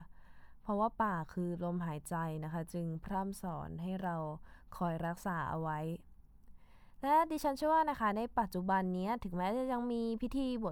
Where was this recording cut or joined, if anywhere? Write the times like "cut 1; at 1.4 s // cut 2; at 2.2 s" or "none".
none